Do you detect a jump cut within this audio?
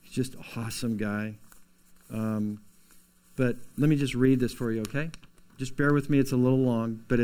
no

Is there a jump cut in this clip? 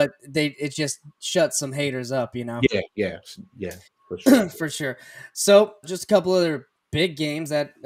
yes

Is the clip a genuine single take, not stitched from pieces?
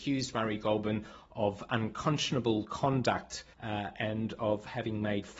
no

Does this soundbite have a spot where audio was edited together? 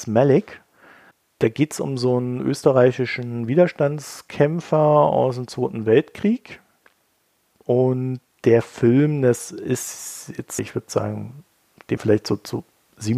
yes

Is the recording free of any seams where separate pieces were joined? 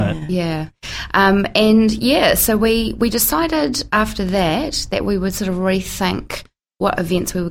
yes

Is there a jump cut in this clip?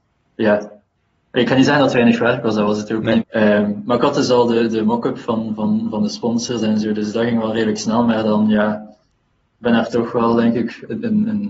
yes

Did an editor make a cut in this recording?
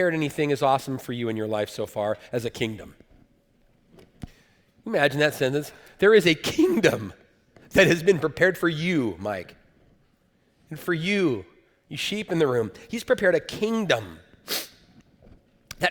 no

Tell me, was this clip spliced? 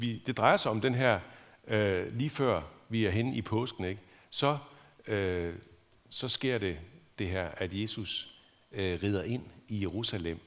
no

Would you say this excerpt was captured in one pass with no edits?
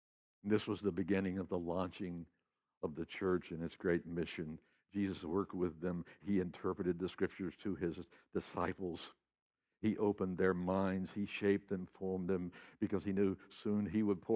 yes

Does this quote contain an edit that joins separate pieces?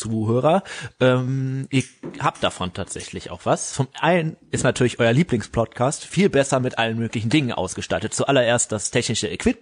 no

